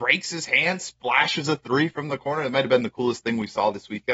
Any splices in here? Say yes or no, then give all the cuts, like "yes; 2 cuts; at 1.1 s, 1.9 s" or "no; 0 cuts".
no; 0 cuts